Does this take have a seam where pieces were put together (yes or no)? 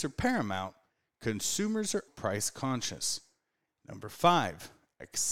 yes